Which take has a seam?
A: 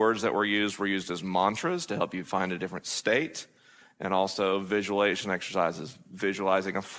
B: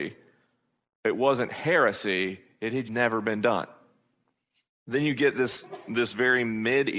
B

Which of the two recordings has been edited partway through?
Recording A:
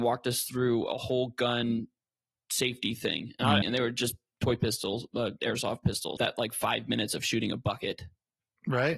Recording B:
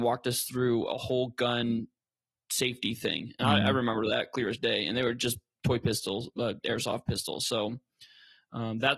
A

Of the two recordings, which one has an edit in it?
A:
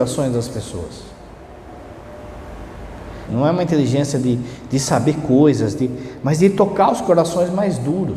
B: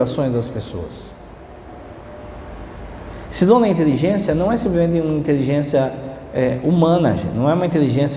A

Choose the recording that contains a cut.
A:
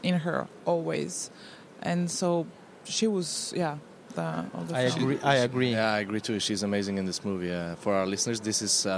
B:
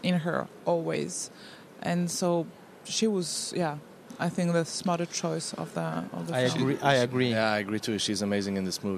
A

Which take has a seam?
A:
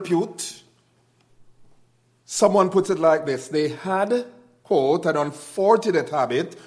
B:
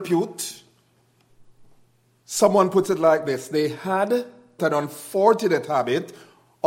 B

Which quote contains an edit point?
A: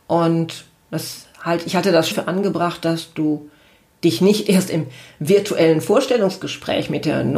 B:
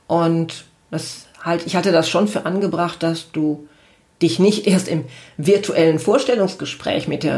A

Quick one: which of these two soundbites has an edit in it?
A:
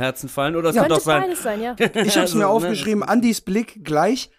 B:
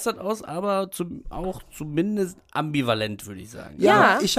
A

